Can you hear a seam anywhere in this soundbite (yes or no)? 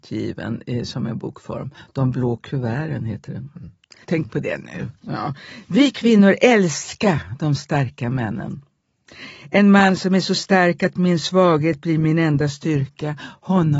yes